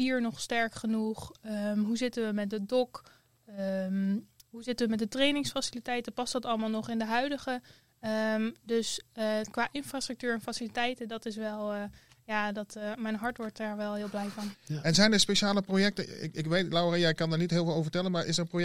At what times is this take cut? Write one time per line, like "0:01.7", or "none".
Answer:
0:14.5